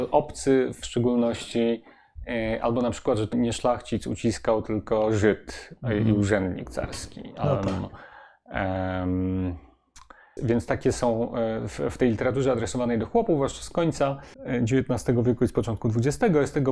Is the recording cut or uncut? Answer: cut